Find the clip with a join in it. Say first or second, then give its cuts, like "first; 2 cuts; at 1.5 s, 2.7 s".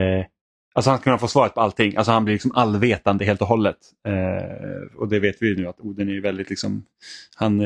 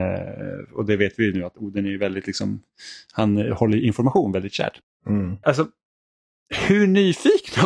second; 1 cut; at 5.4 s